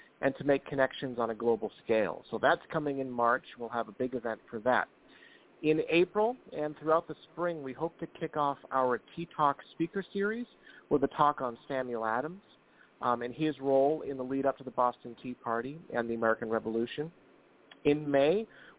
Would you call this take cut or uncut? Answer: uncut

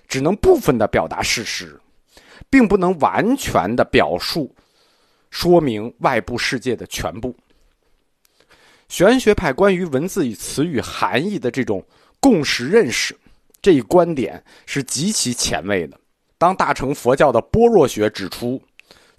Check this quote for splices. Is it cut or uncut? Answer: cut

